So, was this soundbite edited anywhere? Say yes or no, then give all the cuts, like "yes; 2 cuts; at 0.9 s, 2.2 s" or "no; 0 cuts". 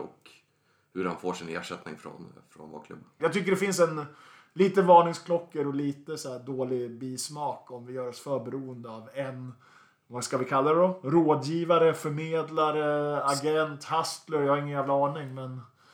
yes; 1 cut; at 3.2 s